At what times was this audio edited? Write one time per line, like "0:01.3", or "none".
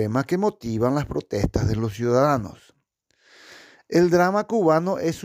none